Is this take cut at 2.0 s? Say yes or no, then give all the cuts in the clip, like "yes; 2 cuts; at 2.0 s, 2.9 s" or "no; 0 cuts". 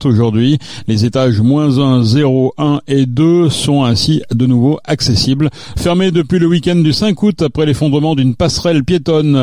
no; 1 cut; at 5.7 s